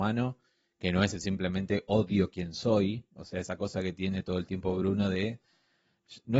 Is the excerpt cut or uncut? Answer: uncut